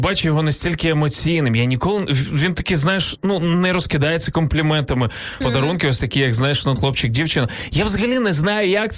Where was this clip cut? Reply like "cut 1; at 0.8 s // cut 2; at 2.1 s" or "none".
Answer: cut 1; at 5.4 s // cut 2; at 6.8 s